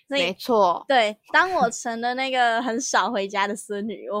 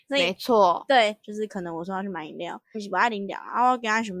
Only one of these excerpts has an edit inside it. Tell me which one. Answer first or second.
second